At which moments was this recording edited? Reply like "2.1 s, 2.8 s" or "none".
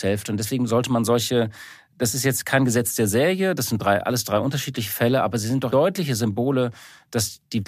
5.7 s